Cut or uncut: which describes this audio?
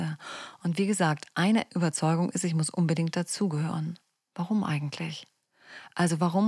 uncut